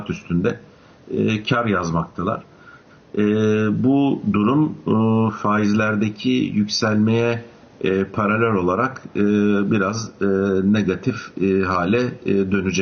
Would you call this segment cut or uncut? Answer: uncut